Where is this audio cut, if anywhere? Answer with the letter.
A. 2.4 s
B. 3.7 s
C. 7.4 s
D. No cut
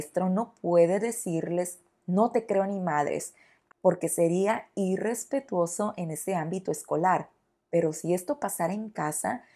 B